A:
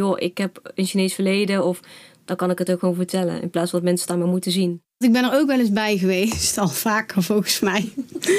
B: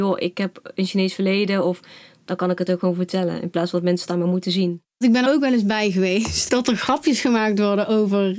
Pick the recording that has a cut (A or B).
B